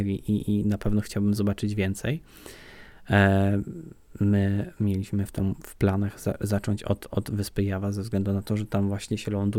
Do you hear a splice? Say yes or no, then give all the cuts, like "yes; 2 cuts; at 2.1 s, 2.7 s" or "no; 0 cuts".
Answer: no; 0 cuts